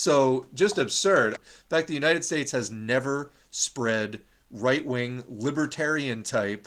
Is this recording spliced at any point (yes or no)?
yes